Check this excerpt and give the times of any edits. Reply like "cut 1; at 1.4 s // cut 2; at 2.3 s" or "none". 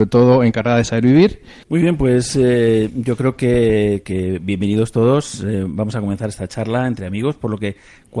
cut 1; at 1.6 s